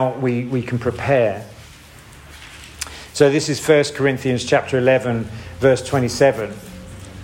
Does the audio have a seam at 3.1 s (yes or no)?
no